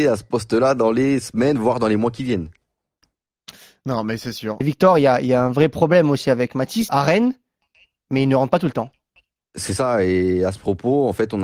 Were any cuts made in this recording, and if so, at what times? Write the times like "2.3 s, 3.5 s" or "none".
4.6 s, 6.9 s, 9.5 s